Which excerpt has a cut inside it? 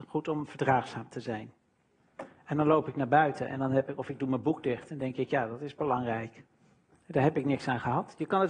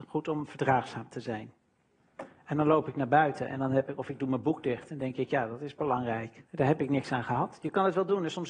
second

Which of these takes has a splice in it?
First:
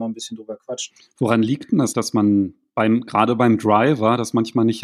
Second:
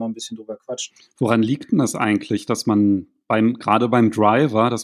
first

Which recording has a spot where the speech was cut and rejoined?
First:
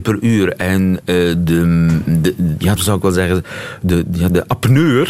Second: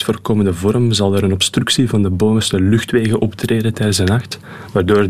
first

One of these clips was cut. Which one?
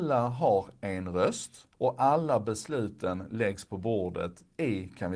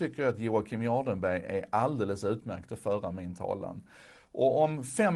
first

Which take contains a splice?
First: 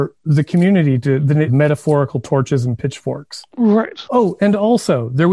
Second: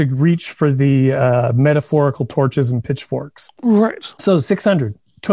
first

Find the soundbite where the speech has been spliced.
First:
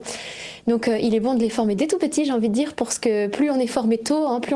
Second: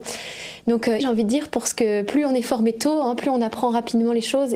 second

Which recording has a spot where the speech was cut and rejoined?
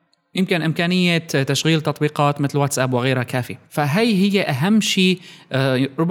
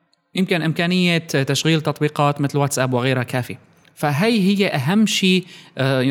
first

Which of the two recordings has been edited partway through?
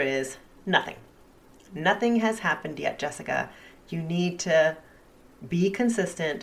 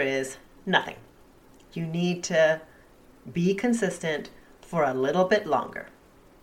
second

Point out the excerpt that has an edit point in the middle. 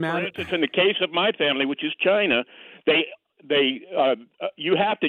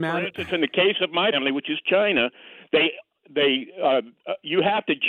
second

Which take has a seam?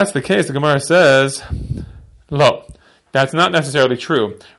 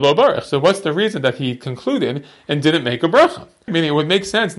second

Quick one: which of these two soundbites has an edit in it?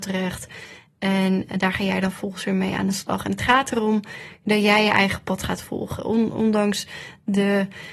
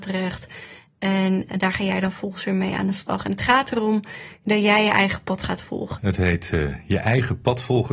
second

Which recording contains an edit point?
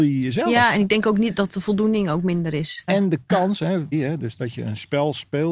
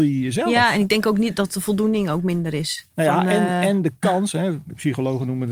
first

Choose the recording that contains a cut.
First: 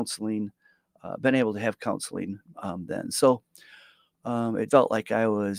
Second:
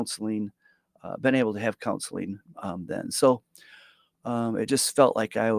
first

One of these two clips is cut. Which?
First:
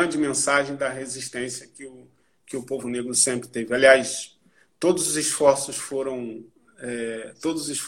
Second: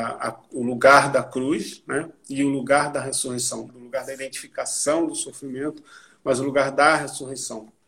second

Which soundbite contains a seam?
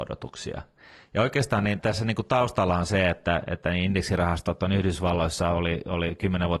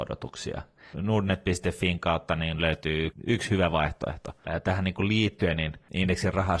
second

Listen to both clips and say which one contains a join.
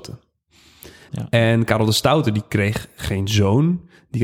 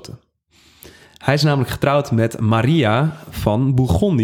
first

